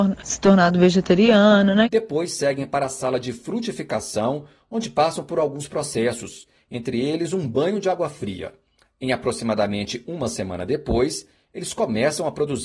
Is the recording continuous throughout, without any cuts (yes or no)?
no